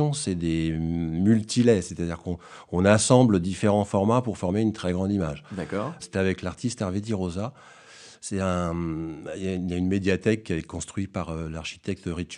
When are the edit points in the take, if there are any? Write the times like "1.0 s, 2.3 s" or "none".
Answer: 6.0 s